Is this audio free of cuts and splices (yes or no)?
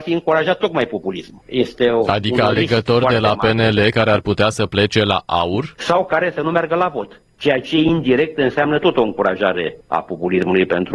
yes